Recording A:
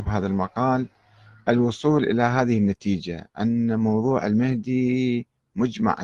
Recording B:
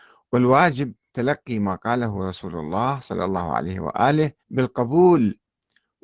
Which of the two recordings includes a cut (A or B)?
B